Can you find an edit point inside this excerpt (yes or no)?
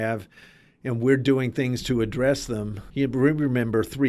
yes